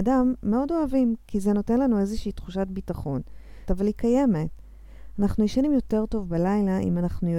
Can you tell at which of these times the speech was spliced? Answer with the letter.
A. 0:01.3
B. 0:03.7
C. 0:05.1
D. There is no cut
B